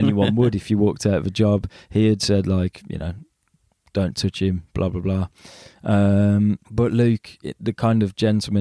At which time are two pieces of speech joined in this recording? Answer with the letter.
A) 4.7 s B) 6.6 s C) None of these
B